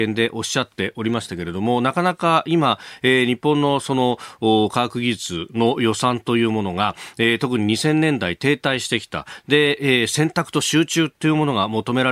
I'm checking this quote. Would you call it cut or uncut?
uncut